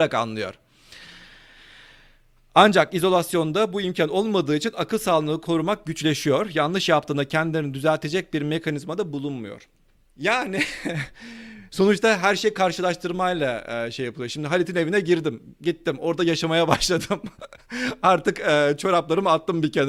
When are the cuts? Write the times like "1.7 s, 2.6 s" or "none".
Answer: none